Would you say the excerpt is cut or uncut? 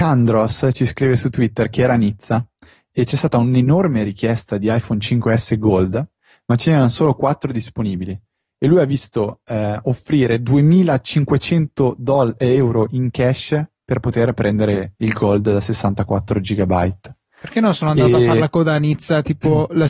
uncut